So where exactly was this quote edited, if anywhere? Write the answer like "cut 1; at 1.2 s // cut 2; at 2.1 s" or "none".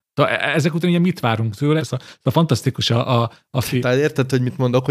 cut 1; at 1.8 s // cut 2; at 3.8 s

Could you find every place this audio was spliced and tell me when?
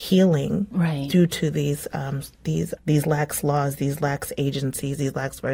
cut 1; at 2.8 s

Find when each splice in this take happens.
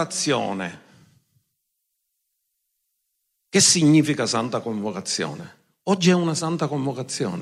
none

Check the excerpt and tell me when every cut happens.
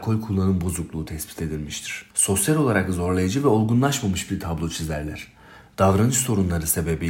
cut 1; at 2.1 s

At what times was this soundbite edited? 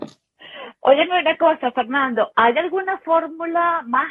none

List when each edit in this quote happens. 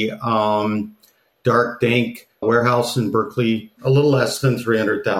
cut 1; at 2.4 s // cut 2; at 3.8 s

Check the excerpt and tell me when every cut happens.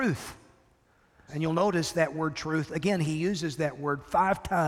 cut 1; at 1.3 s

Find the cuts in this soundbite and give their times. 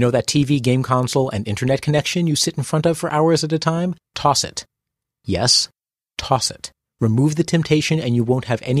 cut 1; at 4.0 s // cut 2; at 6.9 s

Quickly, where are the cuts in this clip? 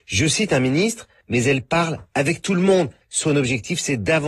cut 1; at 1.2 s // cut 2; at 3.0 s

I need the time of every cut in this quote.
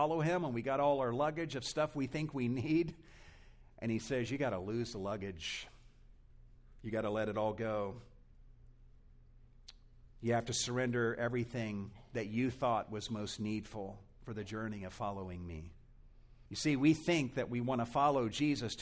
cut 1; at 16.5 s

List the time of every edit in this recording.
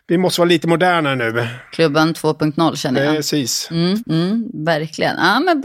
cut 1; at 4.0 s

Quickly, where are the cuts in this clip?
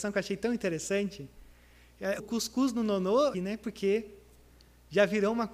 cut 1; at 2.2 s // cut 2; at 3.3 s

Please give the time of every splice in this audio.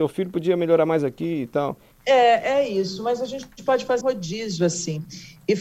cut 1; at 1.9 s // cut 2; at 4.0 s

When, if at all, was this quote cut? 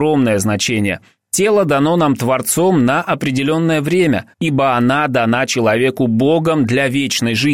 cut 1; at 1.2 s // cut 2; at 4.3 s

